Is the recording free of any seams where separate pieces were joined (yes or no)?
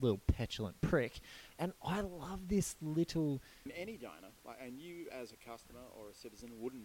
no